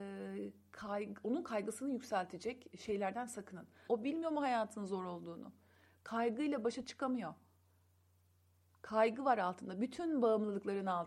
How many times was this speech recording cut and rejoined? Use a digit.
1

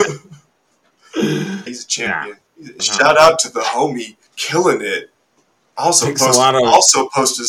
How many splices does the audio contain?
3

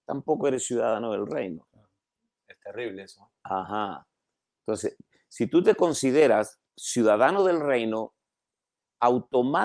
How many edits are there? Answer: 2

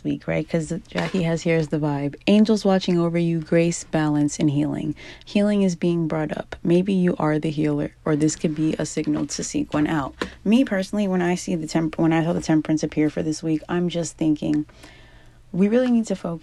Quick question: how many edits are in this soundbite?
1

